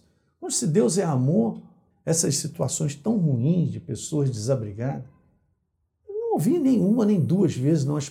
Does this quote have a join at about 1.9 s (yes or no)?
yes